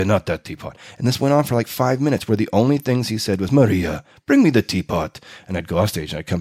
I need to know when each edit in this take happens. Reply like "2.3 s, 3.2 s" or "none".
none